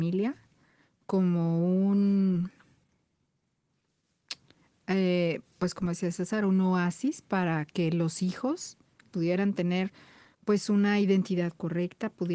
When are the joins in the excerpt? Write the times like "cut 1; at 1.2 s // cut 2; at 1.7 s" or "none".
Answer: cut 1; at 9.0 s